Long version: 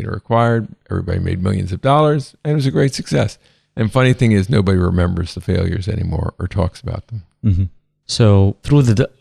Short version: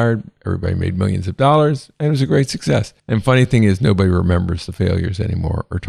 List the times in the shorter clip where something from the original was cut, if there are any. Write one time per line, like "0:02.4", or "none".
0:03.0